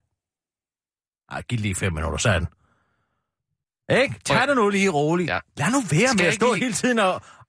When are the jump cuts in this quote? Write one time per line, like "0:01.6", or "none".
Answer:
none